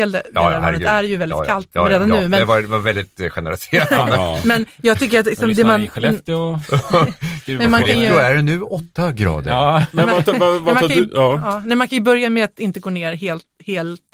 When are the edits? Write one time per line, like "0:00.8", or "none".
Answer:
none